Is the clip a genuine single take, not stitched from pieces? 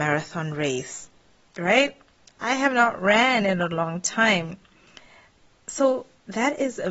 yes; 0 cuts

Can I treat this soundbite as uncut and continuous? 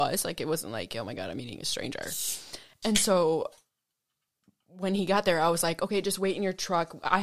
yes; 0 cuts

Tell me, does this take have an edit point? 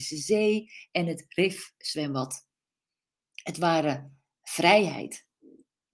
no; 0 cuts

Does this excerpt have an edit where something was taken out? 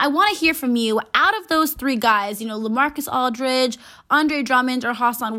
no; 0 cuts

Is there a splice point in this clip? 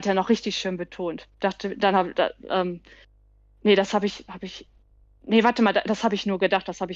yes; 1 cut; at 1.3 s

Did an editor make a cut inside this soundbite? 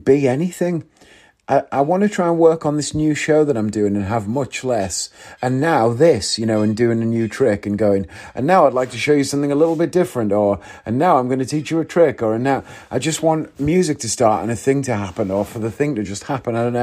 no; 0 cuts

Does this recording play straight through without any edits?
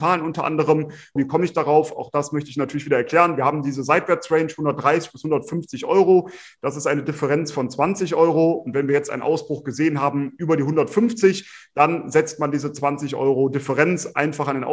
no; 1 cut; at 1.2 s

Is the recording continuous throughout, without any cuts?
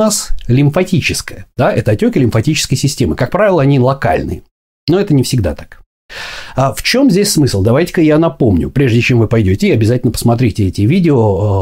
yes; 0 cuts

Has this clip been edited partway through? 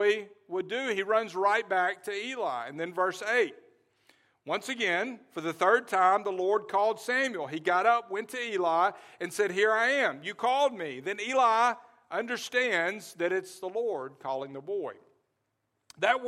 no; 0 cuts

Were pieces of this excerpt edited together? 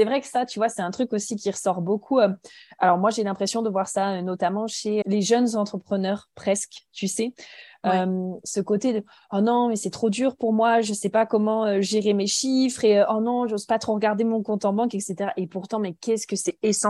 yes; 1 cut; at 5.0 s

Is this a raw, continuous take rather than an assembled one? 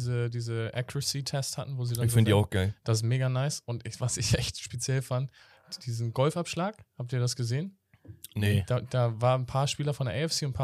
yes; 0 cuts

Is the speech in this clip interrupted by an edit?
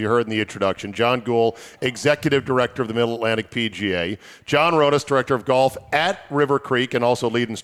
no; 0 cuts

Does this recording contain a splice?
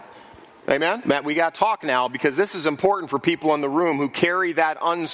yes; 1 cut; at 1.0 s

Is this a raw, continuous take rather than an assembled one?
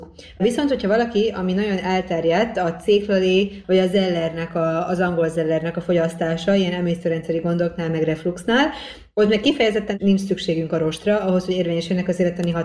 no; 1 cut; at 3.6 s

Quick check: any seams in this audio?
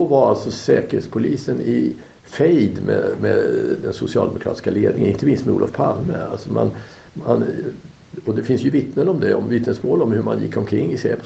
no; 0 cuts

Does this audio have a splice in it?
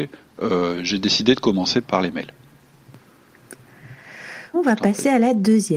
yes; 2 cuts; at 1.8 s, 4.5 s

